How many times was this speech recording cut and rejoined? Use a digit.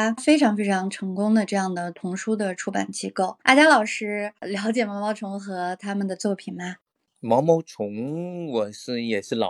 0